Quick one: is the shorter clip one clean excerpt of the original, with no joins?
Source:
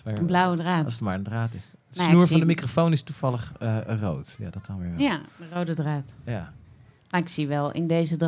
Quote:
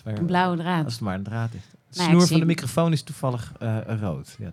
yes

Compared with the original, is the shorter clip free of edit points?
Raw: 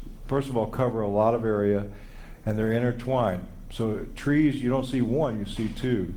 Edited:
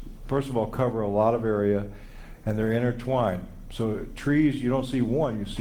yes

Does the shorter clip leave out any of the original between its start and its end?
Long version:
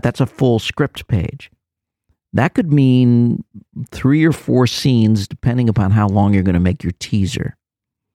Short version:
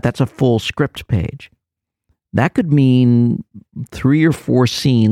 no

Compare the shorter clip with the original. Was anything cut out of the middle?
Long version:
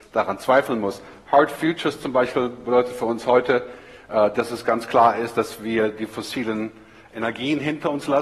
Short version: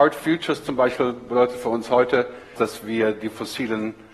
yes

